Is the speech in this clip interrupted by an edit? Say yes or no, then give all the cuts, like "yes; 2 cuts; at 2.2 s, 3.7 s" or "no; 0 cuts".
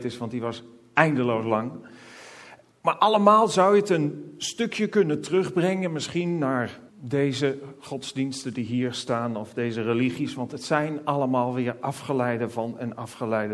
yes; 2 cuts; at 2.7 s, 6.9 s